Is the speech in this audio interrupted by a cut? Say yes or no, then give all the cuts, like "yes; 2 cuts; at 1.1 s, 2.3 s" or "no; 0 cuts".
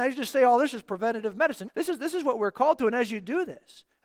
yes; 1 cut; at 1.7 s